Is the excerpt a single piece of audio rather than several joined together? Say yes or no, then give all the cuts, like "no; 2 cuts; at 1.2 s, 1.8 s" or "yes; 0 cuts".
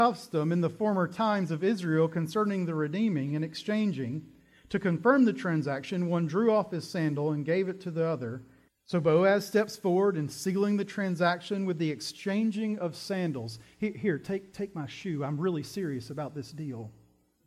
no; 1 cut; at 8.7 s